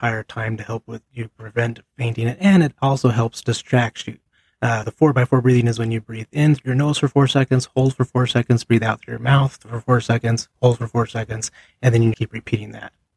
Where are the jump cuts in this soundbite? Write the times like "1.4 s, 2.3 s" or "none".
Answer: 4.8 s, 12.1 s